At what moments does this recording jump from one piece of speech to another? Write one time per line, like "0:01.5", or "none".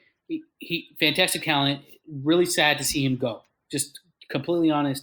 none